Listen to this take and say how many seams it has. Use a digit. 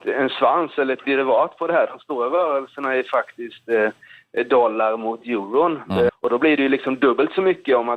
1